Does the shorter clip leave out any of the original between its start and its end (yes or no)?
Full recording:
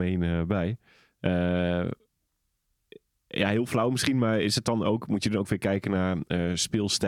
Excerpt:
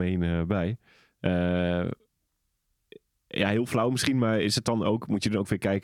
no